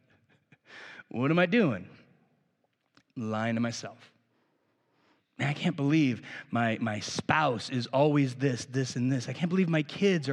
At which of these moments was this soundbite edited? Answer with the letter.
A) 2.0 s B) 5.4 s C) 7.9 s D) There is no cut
D